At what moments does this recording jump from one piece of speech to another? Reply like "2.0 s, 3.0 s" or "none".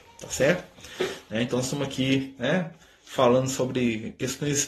none

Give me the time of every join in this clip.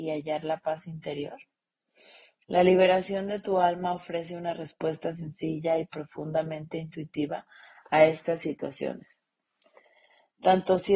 none

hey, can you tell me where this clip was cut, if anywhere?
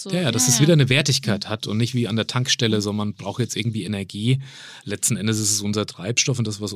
none

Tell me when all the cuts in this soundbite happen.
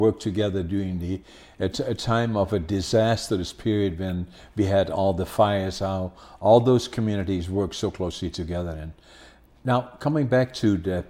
none

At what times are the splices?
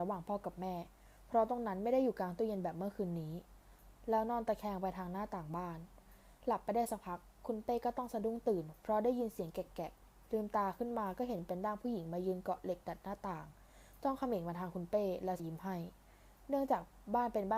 15.4 s

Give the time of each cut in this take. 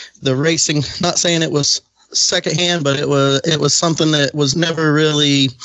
none

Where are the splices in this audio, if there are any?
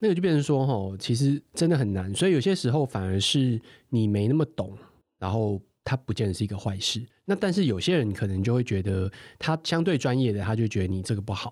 none

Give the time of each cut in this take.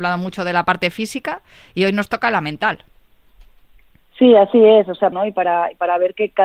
5.1 s

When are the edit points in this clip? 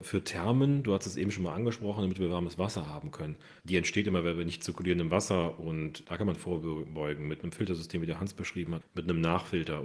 3.6 s, 8.8 s

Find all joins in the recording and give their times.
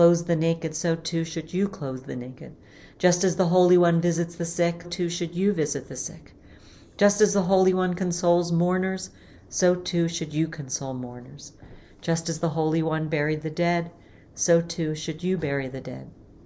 4.8 s

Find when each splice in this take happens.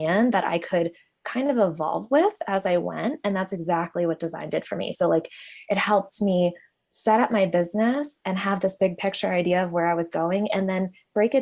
none

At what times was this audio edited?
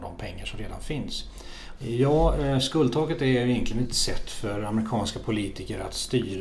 1.8 s, 3.8 s

